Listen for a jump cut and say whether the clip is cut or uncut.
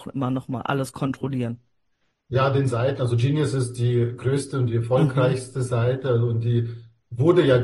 uncut